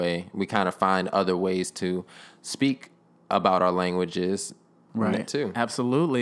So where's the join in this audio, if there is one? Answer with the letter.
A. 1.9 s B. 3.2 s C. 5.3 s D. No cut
C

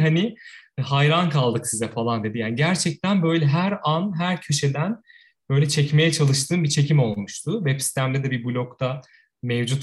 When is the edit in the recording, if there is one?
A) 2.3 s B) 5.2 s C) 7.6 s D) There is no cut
D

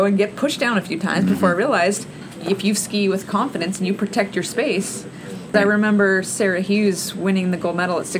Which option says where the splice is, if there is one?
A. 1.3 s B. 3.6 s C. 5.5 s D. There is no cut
C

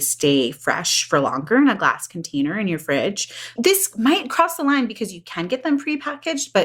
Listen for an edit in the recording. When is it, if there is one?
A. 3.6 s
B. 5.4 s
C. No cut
A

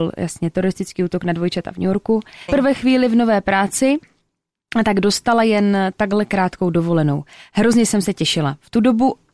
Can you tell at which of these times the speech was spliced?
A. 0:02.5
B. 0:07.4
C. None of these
A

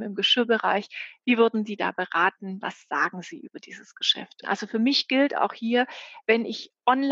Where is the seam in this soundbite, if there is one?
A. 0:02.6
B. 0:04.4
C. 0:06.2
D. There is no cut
B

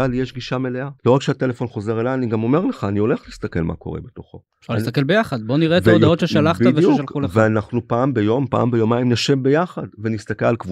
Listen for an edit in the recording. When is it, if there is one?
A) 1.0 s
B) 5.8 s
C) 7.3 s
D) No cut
A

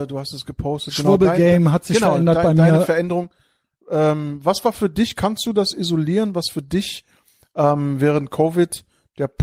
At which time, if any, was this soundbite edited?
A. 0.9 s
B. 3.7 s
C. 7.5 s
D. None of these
D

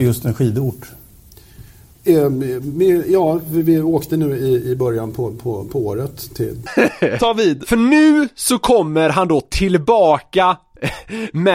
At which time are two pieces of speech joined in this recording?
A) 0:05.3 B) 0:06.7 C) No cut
B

